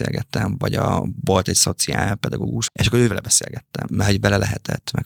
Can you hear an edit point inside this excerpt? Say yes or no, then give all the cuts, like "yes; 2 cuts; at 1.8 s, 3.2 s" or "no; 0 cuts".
yes; 1 cut; at 2.7 s